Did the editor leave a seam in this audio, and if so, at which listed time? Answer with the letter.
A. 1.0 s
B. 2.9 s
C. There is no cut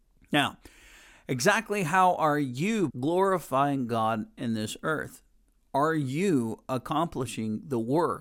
B